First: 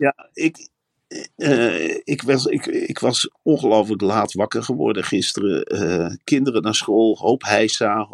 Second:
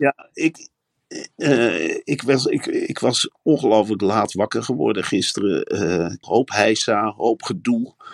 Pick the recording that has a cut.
second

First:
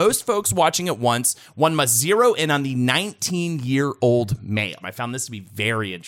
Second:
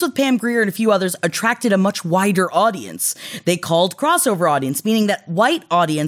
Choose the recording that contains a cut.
first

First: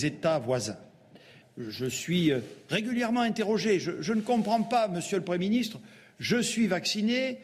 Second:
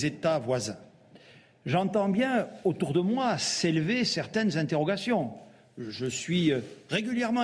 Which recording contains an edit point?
first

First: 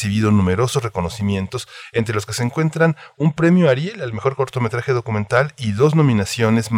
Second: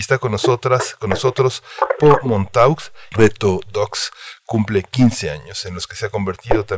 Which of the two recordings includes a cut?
second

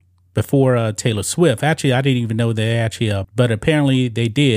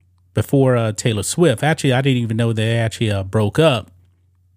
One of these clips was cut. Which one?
first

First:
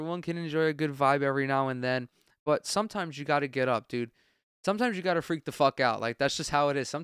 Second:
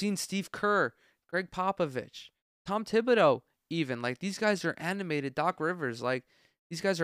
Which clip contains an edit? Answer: second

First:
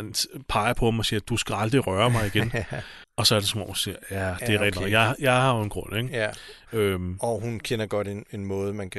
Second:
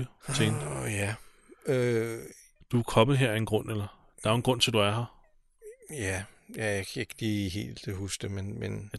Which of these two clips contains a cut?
first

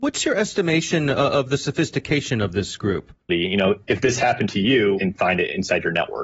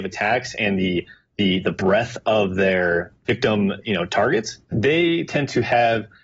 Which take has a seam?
first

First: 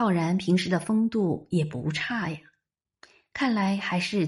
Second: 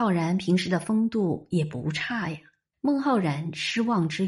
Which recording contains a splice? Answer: second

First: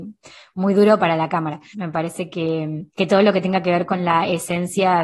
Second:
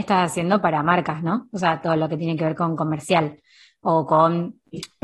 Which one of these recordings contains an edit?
first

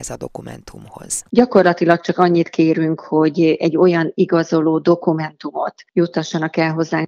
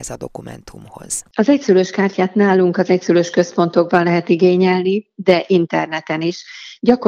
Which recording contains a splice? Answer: first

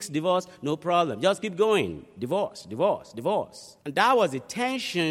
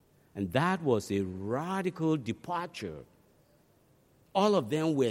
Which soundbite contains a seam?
first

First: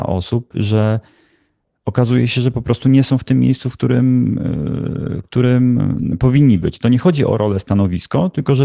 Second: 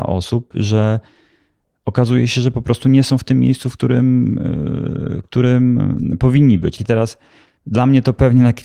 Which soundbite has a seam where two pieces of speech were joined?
second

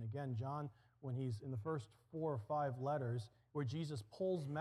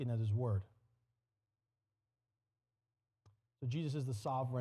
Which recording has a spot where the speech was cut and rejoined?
first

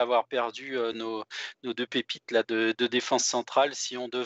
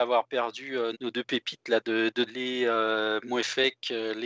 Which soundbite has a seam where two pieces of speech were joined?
second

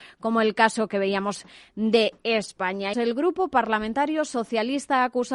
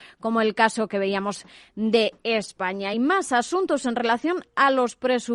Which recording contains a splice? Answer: first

